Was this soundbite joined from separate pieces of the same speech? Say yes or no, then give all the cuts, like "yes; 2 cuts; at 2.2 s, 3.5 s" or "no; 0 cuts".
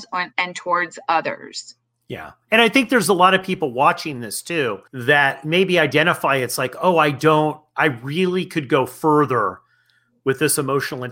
yes; 1 cut; at 4.9 s